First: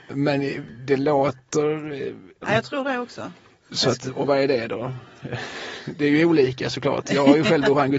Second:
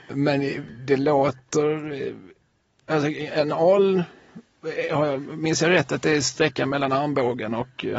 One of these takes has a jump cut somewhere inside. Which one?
first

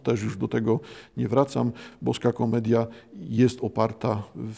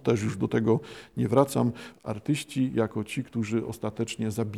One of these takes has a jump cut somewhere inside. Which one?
second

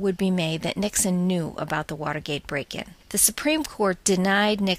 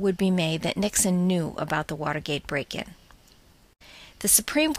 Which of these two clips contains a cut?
first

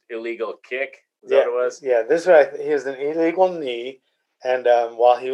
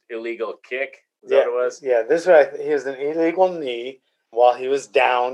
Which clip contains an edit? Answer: second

